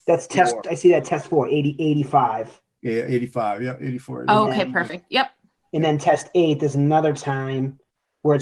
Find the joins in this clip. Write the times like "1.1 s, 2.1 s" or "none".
none